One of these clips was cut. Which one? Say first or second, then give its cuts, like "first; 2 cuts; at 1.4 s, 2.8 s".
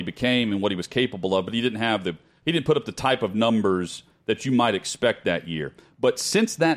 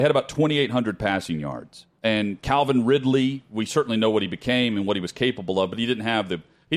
second; 1 cut; at 2.0 s